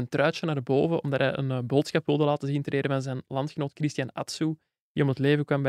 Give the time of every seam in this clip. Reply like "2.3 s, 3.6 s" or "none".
none